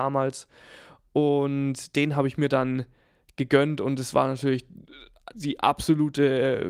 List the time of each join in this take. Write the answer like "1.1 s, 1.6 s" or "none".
5.3 s